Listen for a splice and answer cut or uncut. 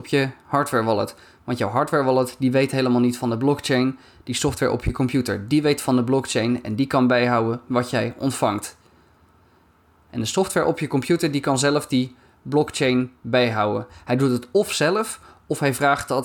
uncut